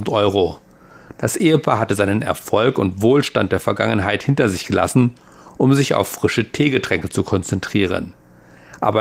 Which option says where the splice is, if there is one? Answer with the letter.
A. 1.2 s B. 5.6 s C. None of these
A